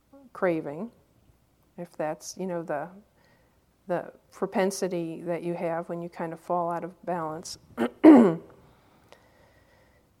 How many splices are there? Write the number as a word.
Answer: zero